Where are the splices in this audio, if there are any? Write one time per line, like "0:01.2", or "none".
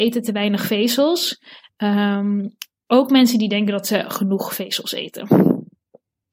none